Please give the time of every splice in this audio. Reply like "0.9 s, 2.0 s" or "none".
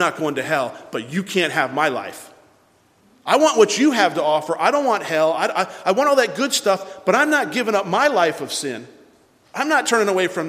none